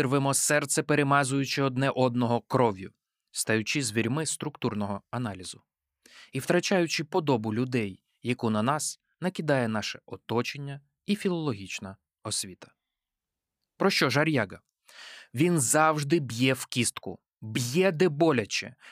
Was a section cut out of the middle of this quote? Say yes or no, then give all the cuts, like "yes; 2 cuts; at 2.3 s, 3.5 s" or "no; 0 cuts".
no; 0 cuts